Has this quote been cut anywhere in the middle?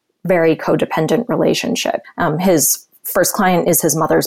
yes; 1 cut; at 2.0 s

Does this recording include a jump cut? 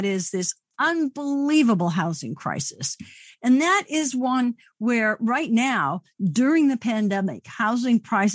no; 0 cuts

